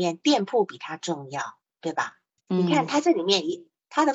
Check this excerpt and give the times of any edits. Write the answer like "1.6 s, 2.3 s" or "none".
2.4 s